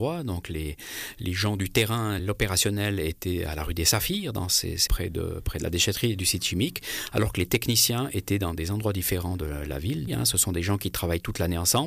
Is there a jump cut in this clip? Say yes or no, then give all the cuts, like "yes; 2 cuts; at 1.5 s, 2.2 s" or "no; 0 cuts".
yes; 3 cuts; at 2.2 s, 4.9 s, 10.1 s